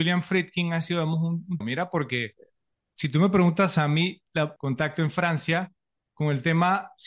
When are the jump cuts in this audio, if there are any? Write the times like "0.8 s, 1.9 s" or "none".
1.6 s, 4.6 s